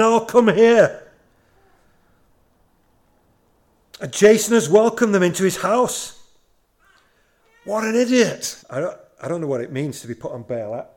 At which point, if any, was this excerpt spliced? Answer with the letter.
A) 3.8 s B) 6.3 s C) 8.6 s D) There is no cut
C